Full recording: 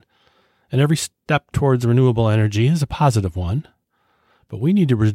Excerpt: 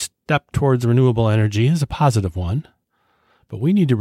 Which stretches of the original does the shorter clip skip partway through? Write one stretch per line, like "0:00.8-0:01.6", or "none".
none